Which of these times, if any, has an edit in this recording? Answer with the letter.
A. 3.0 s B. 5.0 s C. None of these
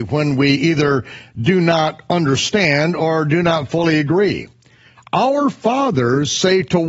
B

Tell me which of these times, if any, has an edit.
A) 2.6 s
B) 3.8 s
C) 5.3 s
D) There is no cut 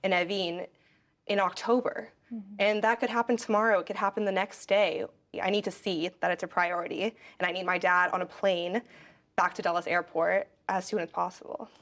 C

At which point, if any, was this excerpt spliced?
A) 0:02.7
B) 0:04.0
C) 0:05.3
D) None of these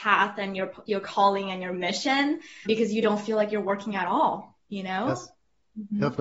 A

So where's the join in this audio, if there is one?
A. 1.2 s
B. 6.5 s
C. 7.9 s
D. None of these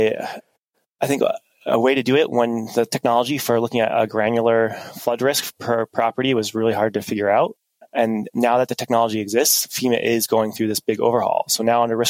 D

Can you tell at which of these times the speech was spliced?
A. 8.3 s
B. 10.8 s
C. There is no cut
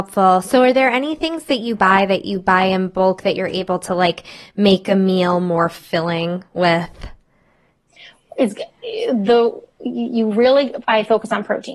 B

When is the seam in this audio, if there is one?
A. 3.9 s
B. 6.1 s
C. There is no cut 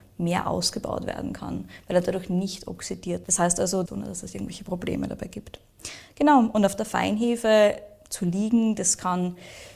A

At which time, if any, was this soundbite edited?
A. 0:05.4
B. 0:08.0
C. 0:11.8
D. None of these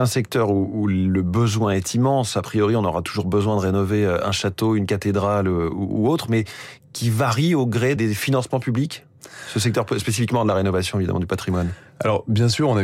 B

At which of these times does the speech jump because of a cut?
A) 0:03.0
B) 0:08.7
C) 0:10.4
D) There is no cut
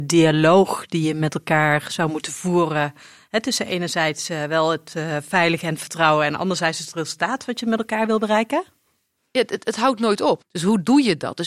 C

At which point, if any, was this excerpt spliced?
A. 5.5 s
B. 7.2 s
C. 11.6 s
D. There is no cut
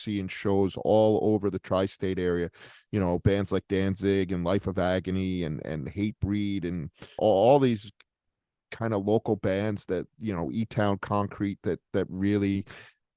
B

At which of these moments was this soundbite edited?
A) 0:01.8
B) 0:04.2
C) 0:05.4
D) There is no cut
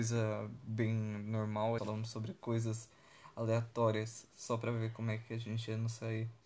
A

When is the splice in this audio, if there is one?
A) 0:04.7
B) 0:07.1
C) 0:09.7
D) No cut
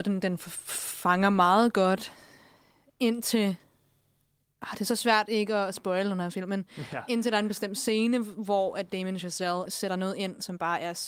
C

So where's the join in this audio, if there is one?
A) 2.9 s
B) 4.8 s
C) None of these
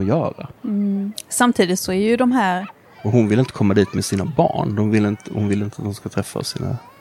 A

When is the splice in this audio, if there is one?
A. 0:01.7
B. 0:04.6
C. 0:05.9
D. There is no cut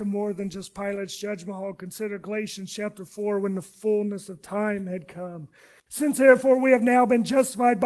C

